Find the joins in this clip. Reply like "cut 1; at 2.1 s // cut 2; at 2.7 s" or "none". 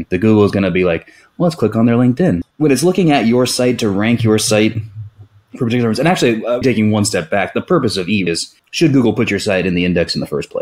cut 1; at 2.4 s // cut 2; at 6.6 s // cut 3; at 8.3 s